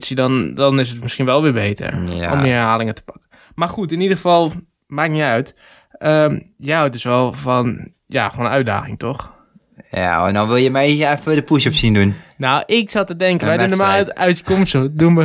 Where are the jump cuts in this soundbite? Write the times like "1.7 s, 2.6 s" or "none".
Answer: none